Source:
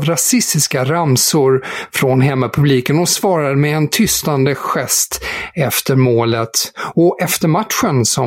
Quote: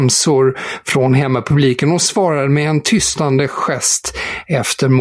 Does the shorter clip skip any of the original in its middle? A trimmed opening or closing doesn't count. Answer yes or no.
no